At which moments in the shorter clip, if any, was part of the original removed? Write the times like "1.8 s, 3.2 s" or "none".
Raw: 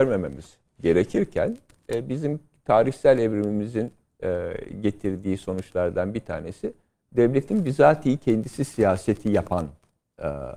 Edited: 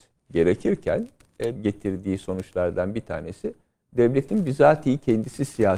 1.6 s